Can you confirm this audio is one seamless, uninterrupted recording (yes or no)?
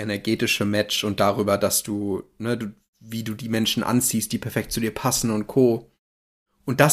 yes